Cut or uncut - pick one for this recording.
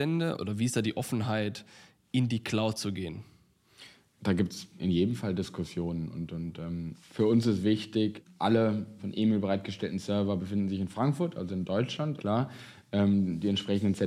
cut